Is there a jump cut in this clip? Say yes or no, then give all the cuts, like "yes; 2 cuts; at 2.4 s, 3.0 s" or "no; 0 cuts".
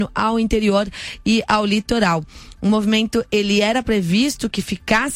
no; 0 cuts